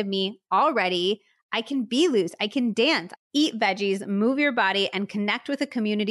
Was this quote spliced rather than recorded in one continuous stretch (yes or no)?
yes